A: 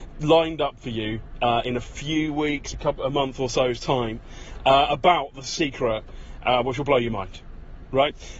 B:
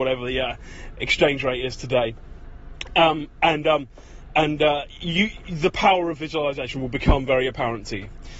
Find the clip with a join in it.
A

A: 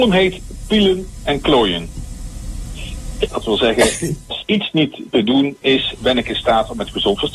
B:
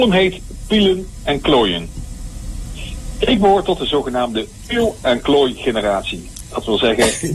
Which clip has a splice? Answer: A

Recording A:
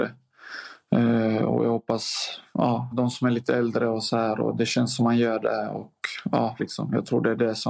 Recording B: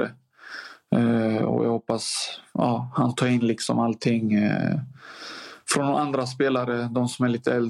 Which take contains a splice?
A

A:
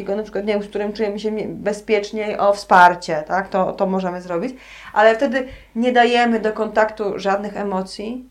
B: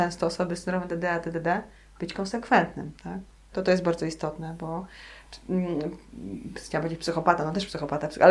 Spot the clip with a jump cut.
B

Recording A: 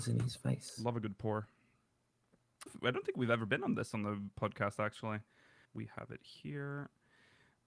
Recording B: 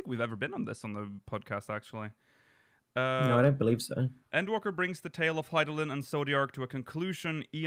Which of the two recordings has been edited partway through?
A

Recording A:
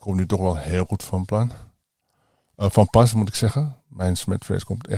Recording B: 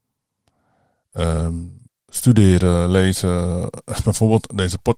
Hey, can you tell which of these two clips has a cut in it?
B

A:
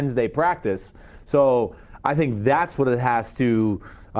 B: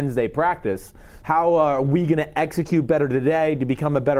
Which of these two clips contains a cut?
B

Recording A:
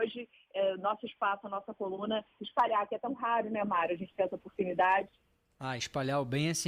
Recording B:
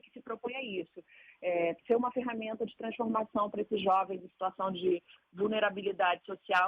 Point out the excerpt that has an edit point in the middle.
A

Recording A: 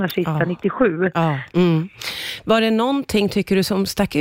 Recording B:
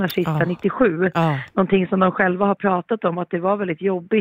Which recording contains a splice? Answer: A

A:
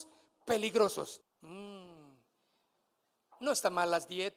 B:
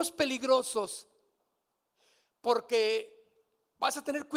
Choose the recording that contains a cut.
A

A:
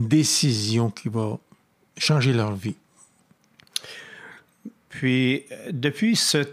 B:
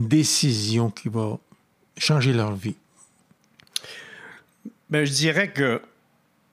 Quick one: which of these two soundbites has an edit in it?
A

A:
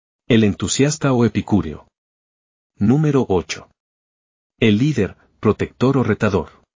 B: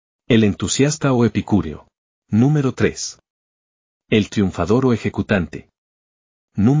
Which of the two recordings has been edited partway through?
B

